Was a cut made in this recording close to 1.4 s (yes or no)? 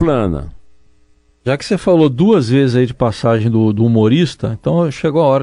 yes